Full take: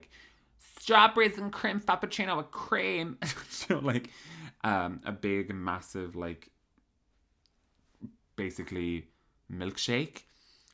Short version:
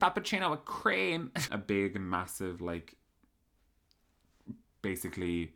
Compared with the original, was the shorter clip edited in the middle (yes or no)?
yes